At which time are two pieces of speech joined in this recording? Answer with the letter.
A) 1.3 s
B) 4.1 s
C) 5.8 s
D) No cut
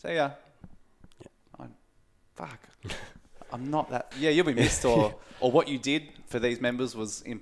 B